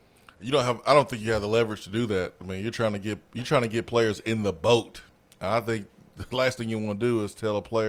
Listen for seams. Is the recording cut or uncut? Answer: uncut